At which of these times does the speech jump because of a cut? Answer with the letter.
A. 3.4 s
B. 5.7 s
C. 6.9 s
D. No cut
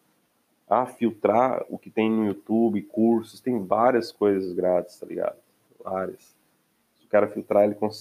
B